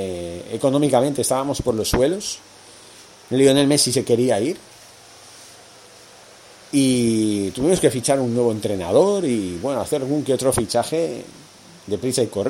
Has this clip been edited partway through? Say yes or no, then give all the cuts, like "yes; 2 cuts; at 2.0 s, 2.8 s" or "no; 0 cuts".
no; 0 cuts